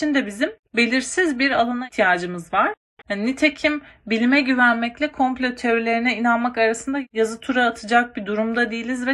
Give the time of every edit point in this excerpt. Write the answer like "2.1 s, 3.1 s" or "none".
3.0 s